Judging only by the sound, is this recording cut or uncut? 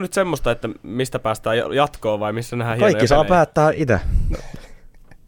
cut